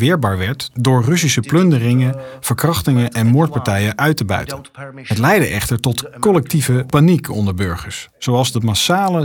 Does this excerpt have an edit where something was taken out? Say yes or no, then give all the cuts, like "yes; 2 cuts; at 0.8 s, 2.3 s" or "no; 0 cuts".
no; 0 cuts